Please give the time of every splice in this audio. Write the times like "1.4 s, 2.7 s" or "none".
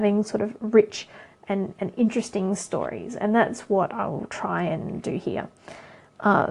none